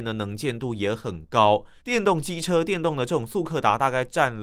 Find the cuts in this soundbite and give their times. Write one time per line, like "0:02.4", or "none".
0:01.8